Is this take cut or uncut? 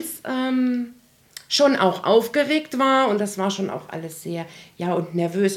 uncut